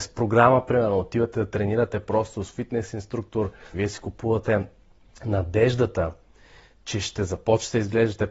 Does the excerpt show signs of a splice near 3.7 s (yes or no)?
yes